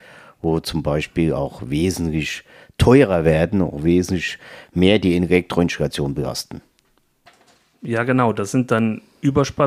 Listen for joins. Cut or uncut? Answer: uncut